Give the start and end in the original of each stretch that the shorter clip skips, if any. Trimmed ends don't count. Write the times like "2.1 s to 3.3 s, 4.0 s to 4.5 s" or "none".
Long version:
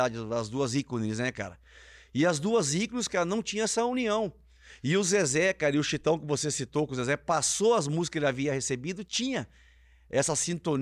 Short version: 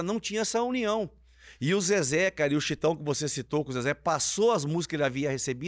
none